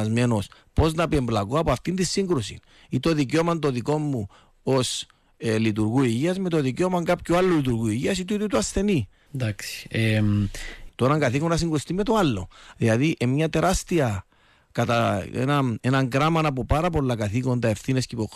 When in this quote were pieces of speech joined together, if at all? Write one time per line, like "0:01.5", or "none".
0:09.3
0:10.9
0:12.7